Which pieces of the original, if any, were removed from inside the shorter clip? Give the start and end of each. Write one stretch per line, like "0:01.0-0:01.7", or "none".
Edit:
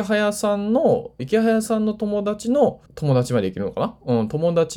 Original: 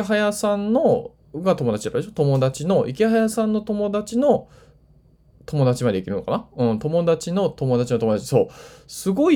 0:01.2-0:02.9
0:04.5-0:05.4